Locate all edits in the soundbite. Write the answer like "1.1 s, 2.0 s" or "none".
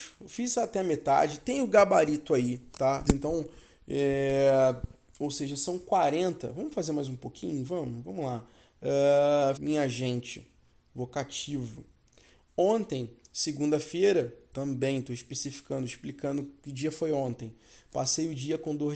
3.1 s, 9.6 s, 12.4 s

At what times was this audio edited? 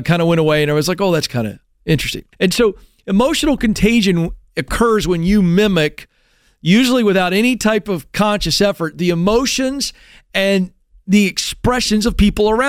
2.3 s

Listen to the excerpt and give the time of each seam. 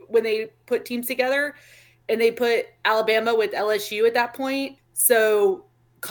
4.8 s

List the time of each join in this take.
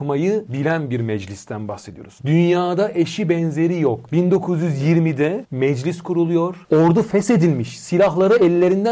2.2 s

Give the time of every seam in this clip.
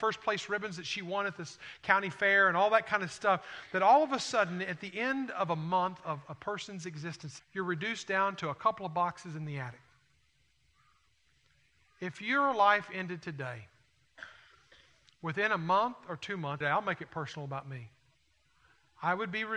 7.4 s, 16.6 s

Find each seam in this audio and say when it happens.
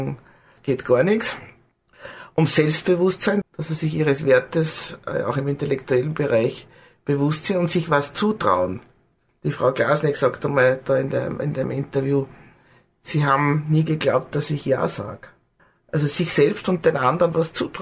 3.4 s

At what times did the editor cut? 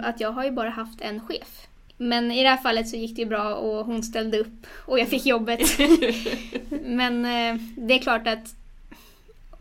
1.9 s

